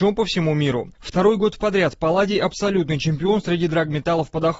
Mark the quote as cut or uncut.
uncut